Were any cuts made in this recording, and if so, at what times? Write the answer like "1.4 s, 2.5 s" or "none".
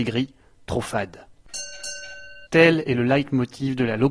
2.5 s